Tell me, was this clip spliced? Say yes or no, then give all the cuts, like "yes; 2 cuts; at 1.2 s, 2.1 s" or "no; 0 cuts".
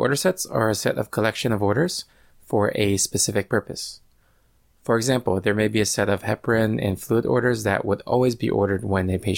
no; 0 cuts